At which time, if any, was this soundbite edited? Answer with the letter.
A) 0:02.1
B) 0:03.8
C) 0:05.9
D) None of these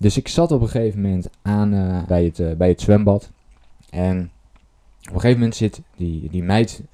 A